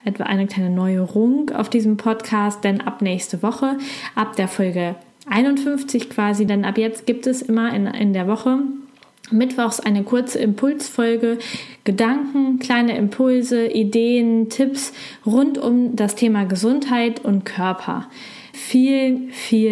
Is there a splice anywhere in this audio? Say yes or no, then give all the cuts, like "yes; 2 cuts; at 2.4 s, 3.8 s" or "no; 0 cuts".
yes; 2 cuts; at 6.5 s, 18.5 s